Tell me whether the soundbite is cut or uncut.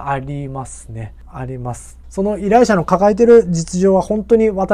cut